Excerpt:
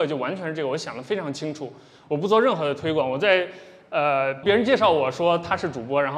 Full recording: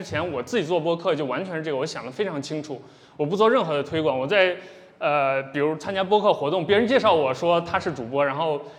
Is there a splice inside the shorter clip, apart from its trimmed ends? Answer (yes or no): yes